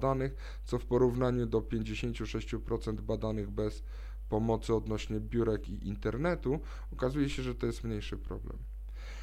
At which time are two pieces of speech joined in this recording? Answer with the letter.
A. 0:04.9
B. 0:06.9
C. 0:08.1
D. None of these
D